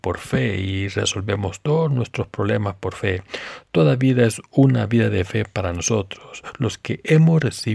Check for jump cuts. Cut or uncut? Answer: uncut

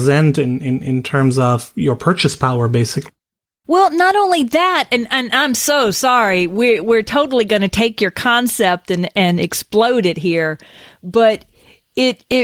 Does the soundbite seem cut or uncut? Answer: uncut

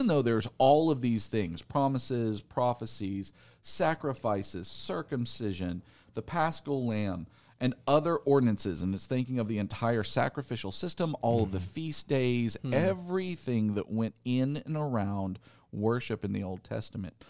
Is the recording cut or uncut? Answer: uncut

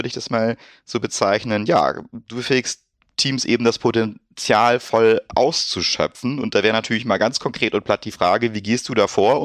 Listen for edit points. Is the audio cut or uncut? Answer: uncut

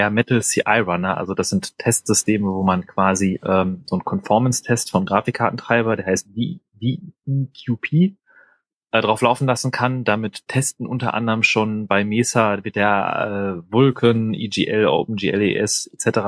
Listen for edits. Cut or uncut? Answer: uncut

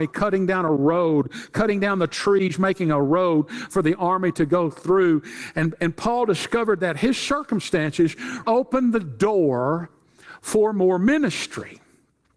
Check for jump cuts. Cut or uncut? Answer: cut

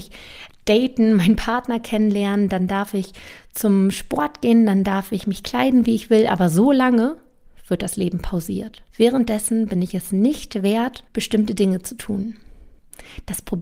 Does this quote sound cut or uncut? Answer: cut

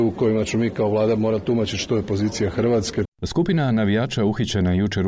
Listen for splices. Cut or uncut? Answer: cut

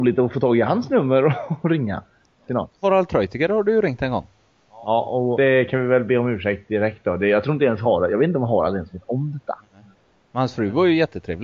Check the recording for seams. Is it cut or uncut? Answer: cut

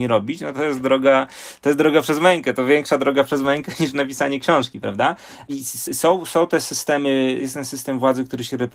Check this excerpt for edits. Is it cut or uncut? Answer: uncut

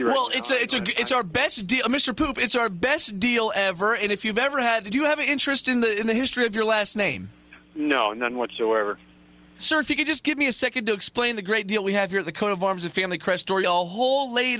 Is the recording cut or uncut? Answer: cut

